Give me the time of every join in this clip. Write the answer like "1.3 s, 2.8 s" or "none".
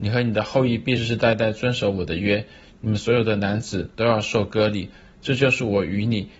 1.0 s

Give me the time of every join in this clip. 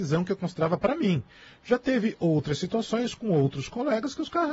none

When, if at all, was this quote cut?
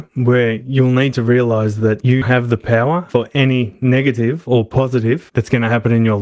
2.2 s

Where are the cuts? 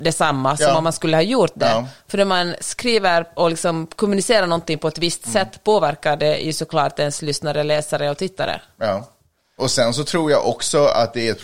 9.6 s

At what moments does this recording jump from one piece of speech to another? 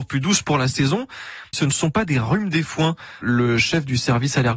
1.5 s, 3.2 s

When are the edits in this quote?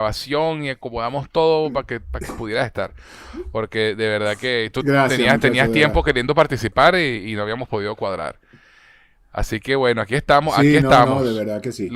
none

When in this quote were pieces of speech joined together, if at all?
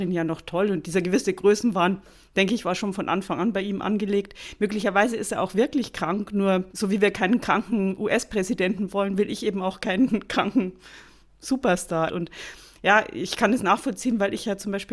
6.7 s, 12.1 s

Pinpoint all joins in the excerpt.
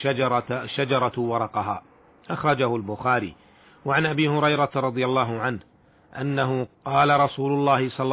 6.7 s

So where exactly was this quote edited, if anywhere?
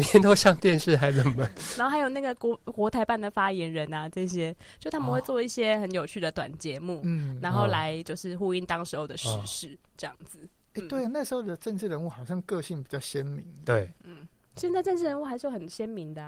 none

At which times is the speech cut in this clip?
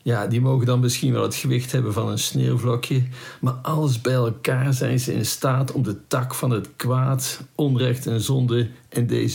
none

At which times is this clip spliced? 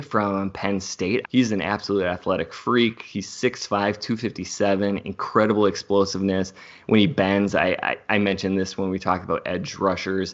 1.2 s

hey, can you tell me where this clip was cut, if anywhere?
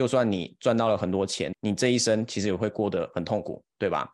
1.5 s

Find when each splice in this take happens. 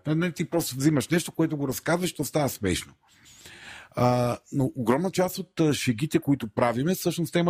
none

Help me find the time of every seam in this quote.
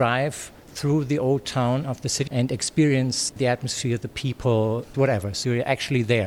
2.3 s, 4.9 s

